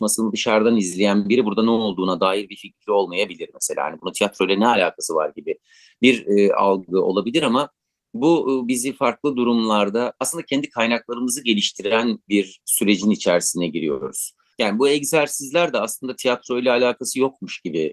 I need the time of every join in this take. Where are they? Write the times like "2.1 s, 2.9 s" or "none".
14.5 s